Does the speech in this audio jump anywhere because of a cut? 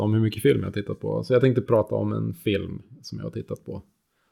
no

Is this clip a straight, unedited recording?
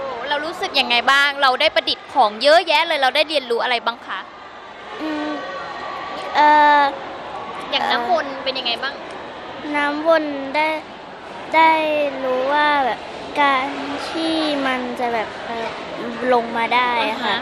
no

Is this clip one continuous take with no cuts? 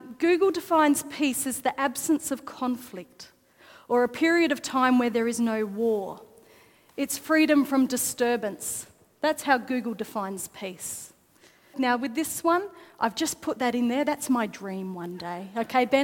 no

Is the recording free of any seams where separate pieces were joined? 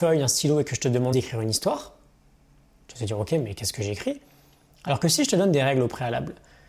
no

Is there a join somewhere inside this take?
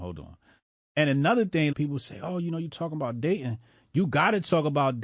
yes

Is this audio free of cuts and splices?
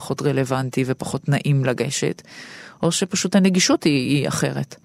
yes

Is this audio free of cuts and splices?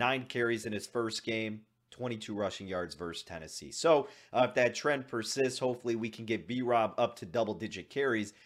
yes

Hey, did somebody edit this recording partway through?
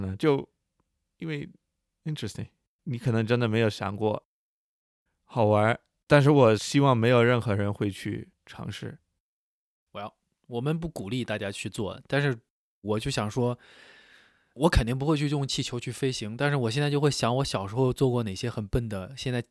no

